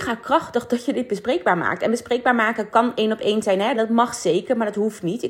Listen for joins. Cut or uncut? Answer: cut